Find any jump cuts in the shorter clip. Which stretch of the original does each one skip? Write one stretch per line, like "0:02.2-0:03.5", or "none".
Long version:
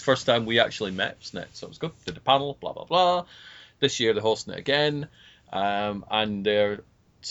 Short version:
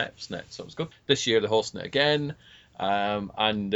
0:01.9-0:03.6